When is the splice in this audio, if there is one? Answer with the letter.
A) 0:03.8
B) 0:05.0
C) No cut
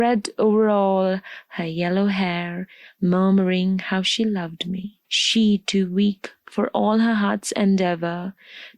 B